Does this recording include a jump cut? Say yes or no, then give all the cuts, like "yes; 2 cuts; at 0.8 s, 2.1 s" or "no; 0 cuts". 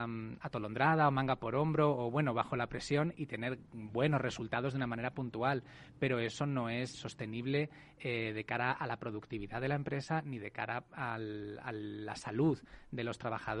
yes; 1 cut; at 6.9 s